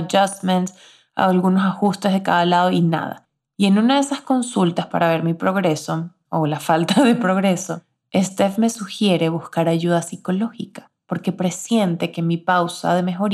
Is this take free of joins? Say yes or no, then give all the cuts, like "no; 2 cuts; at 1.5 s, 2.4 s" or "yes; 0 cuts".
yes; 0 cuts